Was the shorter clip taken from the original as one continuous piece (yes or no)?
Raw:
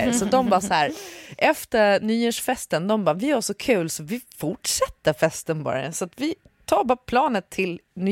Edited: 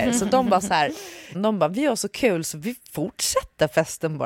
no